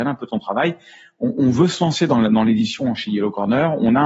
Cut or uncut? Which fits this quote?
uncut